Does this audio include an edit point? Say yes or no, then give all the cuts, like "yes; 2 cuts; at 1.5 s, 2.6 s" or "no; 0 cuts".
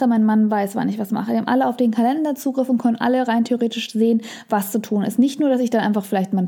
no; 0 cuts